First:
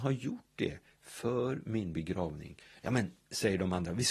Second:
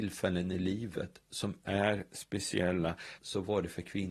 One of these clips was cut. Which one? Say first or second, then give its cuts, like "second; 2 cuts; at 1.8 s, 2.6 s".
second; 1 cut; at 3.2 s